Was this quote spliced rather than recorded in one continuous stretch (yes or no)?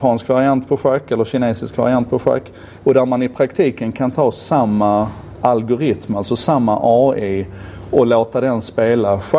yes